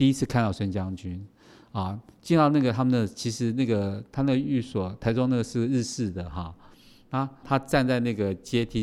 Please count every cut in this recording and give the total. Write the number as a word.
one